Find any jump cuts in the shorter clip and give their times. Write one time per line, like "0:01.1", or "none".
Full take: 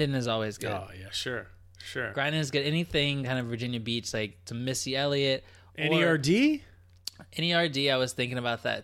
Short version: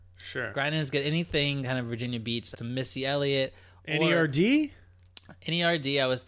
0:02.5